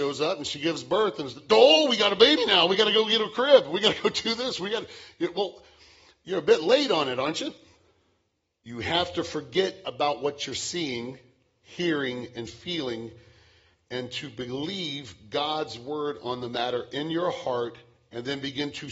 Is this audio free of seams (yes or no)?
no